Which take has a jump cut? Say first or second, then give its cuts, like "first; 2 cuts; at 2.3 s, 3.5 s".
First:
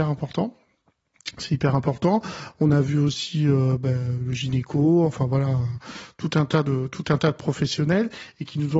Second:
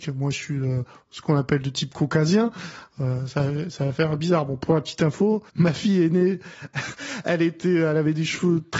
second; 2 cuts; at 5.5 s, 6.9 s